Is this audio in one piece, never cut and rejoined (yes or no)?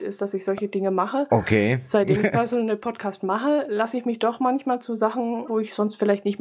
no